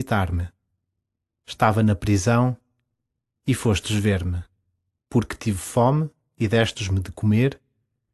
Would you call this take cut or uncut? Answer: cut